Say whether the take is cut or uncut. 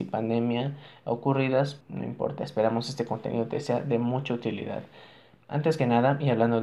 cut